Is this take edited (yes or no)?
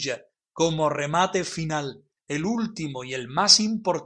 yes